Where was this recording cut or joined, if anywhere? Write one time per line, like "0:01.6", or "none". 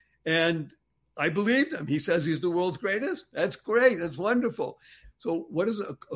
0:05.0

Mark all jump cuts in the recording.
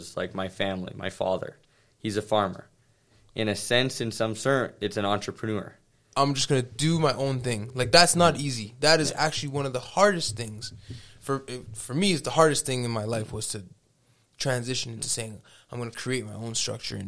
0:06.1

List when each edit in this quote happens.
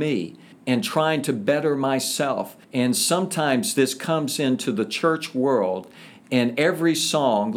0:02.6

